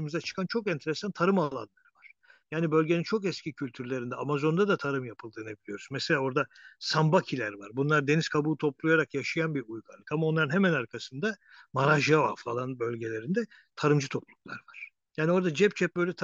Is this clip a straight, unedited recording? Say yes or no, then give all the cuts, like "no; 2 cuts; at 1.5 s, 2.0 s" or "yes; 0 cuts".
yes; 0 cuts